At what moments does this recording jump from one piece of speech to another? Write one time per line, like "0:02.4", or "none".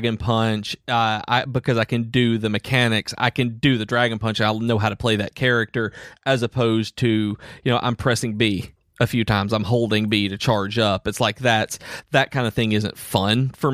none